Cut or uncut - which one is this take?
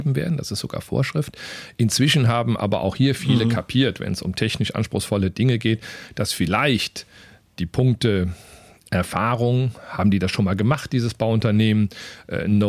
uncut